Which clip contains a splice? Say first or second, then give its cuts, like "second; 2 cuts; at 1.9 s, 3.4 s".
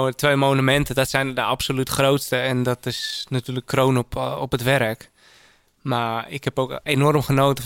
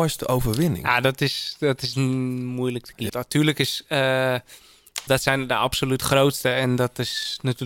second; 2 cuts; at 3.1 s, 5.1 s